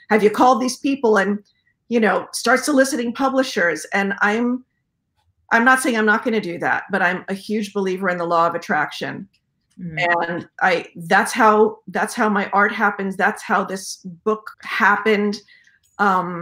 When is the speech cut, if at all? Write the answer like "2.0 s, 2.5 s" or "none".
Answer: 14.5 s